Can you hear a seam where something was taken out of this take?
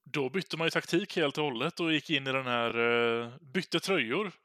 no; 0 cuts

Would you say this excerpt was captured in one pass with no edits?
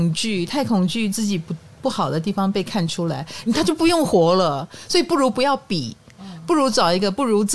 no; 1 cut; at 3.5 s

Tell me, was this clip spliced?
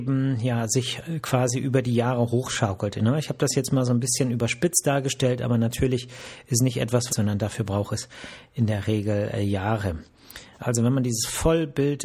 yes; 2 cuts; at 7.1 s, 10.6 s

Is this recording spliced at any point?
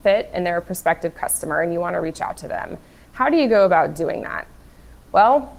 no; 0 cuts

